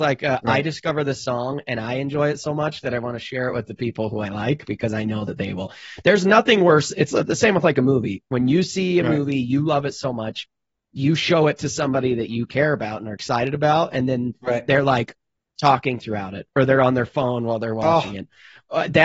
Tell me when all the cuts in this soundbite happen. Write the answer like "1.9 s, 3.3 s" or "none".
none